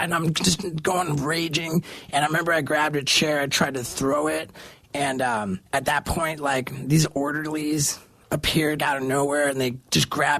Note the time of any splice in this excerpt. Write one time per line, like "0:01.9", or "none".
0:05.7
0:08.8